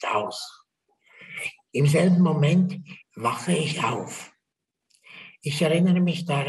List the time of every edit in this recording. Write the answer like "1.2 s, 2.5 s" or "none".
3.0 s